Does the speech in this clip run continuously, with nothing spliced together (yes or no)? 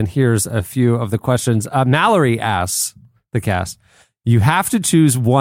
yes